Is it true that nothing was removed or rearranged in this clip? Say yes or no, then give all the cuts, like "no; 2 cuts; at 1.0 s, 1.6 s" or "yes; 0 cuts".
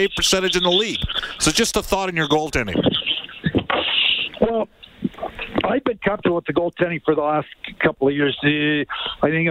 yes; 0 cuts